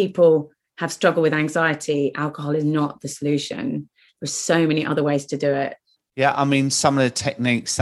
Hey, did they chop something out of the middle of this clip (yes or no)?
yes